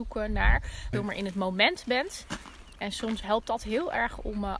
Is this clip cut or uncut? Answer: cut